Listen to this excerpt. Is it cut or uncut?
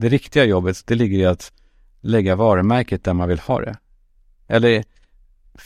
uncut